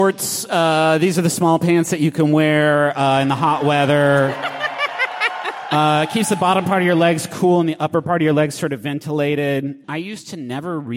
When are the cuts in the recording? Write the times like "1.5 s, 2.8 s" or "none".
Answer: 9.8 s